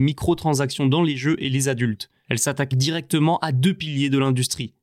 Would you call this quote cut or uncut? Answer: cut